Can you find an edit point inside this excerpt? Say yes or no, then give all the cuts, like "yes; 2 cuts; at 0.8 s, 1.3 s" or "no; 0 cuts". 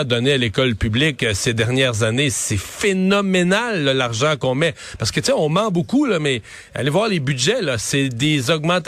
no; 0 cuts